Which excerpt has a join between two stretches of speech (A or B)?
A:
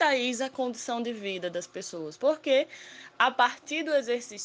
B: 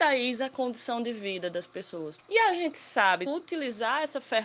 B